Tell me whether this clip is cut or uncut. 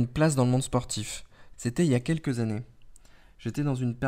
cut